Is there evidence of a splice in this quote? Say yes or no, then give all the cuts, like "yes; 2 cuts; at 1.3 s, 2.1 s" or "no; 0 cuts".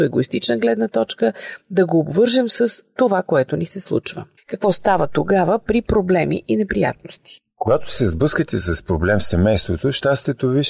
no; 0 cuts